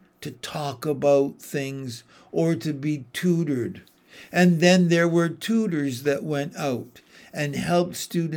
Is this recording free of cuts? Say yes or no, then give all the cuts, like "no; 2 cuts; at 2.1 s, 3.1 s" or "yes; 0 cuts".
yes; 0 cuts